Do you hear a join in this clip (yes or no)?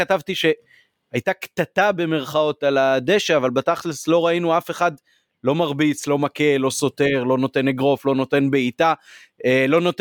no